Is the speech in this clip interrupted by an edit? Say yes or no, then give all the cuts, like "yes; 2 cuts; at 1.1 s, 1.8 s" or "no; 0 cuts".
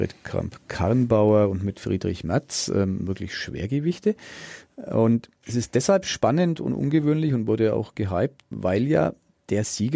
yes; 2 cuts; at 5.4 s, 8.5 s